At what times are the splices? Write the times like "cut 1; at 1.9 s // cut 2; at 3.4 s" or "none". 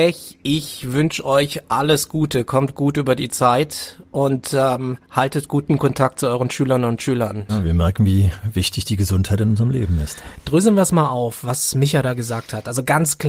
cut 1; at 7.5 s